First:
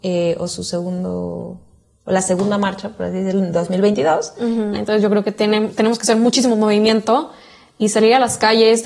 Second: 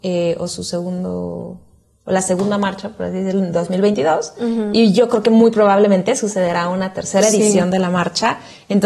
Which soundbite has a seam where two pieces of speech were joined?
first; 1 cut; at 4.7 s

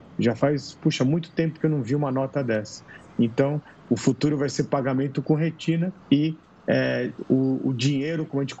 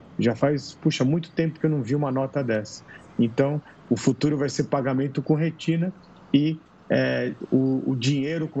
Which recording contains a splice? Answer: first; 1 cut; at 6.0 s

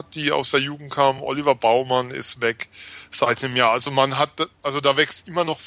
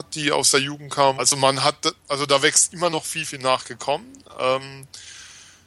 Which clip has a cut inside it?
second; 2 cuts; at 1.2 s, 3.2 s

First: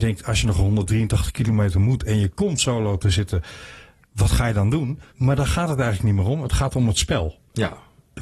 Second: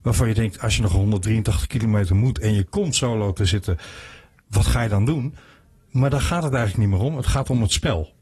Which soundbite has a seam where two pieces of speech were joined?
first; 1 cut; at 5.1 s

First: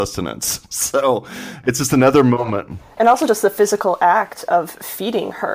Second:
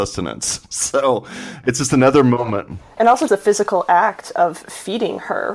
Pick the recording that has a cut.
second; 1 cut; at 3.3 s

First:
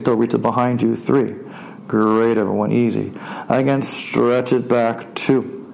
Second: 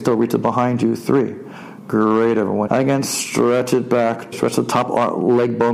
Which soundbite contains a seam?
second; 2 cuts; at 2.7 s, 4.3 s

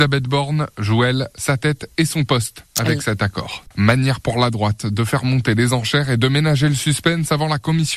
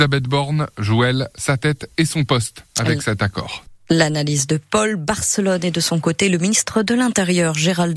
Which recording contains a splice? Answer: first; 1 cut; at 3.7 s

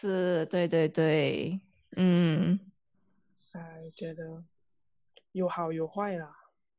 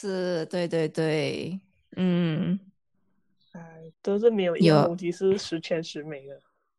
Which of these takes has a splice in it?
second; 1 cut; at 3.9 s

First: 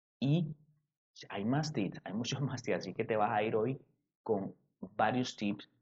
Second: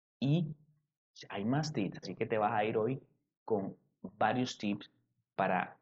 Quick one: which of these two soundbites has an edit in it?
second; 1 cut; at 2.0 s

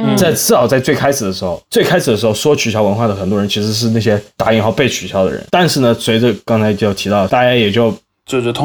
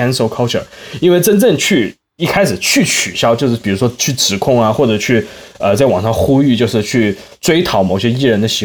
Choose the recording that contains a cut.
first; 2 cuts; at 5.5 s, 7.3 s

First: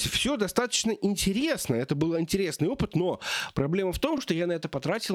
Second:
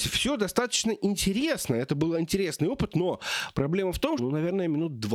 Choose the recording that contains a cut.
second; 1 cut; at 4.2 s

